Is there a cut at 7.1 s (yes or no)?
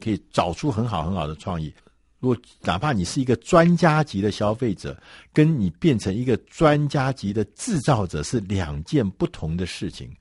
no